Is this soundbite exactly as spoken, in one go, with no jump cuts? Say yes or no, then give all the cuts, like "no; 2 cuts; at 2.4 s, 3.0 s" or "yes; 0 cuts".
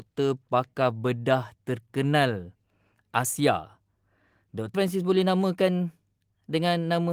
no; 1 cut; at 4.7 s